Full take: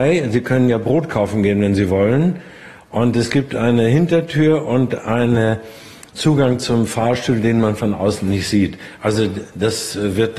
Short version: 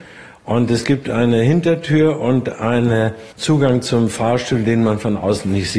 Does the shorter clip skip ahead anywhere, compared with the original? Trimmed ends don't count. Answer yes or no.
yes